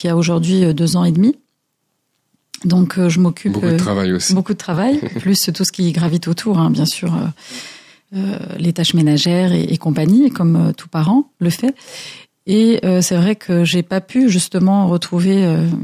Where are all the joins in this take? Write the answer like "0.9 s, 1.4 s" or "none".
none